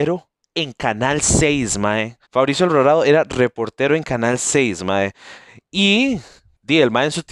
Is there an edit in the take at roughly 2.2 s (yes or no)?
yes